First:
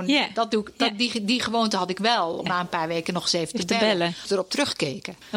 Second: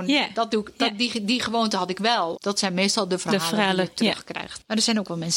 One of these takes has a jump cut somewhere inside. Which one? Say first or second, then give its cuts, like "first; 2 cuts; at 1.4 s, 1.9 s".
second; 1 cut; at 2.3 s